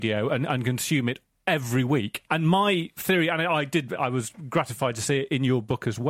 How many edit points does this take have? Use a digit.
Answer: 1